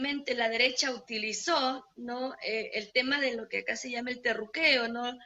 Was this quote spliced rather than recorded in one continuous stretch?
no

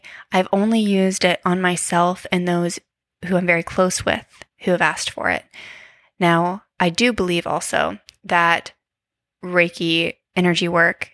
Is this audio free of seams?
yes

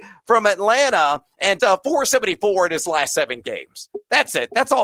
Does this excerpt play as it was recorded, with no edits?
no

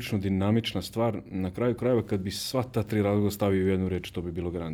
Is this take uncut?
yes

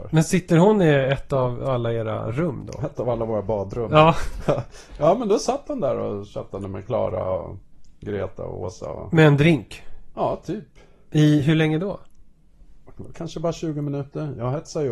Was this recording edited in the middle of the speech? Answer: no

